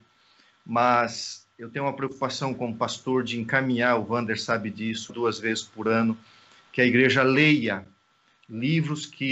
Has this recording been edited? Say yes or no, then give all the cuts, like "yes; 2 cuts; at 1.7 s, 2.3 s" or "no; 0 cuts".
yes; 1 cut; at 5.1 s